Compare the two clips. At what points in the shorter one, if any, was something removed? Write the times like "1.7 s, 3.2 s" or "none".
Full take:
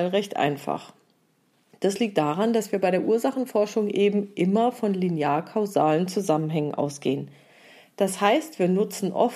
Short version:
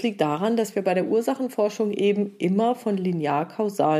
none